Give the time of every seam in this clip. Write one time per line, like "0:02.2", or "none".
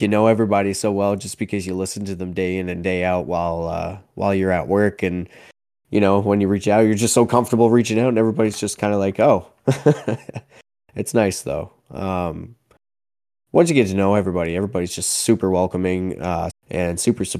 0:16.5